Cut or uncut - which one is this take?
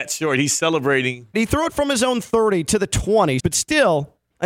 cut